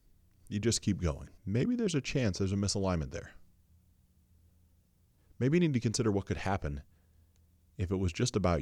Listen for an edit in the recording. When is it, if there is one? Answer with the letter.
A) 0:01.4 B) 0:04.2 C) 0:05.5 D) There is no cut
A